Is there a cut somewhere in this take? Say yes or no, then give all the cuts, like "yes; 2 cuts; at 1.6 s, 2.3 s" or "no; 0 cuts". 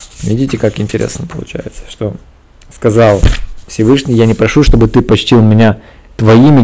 no; 0 cuts